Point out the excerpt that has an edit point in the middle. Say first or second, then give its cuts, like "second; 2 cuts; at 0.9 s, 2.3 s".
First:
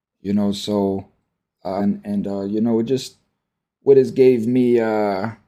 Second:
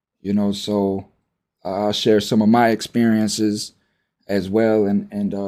first; 1 cut; at 1.8 s